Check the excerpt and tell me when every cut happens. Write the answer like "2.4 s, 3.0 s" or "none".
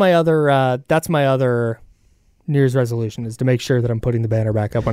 none